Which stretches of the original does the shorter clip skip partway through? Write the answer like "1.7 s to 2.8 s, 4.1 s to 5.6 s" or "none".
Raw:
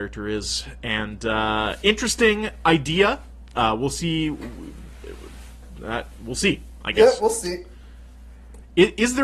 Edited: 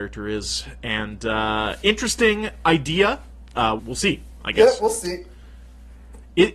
3.8 s to 6.2 s